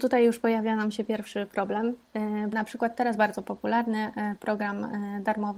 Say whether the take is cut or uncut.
cut